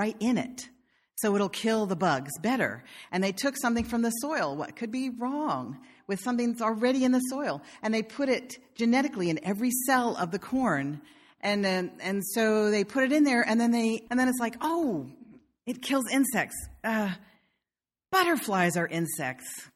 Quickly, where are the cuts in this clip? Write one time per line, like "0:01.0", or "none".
0:11.4
0:14.1